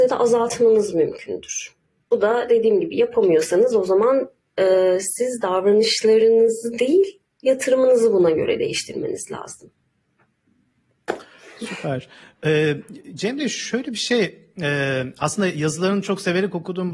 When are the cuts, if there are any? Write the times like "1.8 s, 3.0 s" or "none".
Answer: none